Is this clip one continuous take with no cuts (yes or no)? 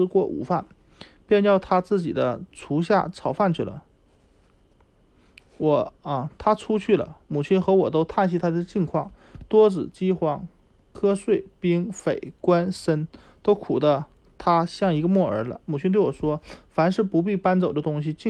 yes